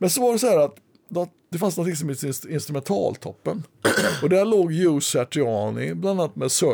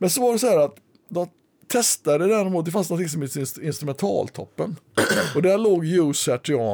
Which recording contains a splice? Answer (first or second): first